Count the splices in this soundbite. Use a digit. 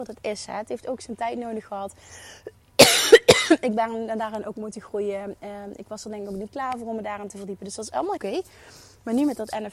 1